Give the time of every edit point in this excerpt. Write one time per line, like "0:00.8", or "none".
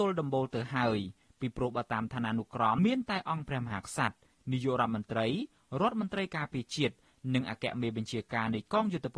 0:02.8